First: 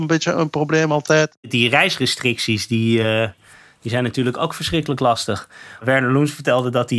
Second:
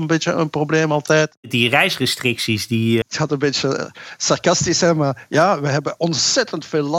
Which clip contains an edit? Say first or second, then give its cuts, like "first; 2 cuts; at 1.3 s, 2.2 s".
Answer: second; 1 cut; at 3.0 s